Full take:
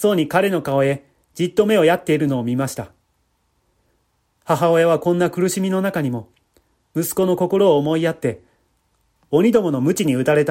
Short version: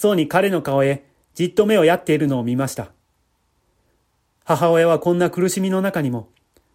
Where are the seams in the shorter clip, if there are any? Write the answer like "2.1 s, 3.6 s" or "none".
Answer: none